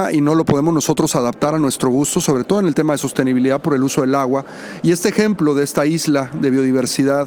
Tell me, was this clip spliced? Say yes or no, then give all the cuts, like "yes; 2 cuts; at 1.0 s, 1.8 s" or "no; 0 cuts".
no; 0 cuts